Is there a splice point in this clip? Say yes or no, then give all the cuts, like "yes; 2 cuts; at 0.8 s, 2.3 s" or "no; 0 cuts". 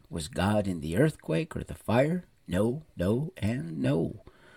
no; 0 cuts